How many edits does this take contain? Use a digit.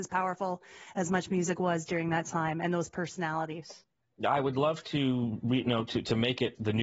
0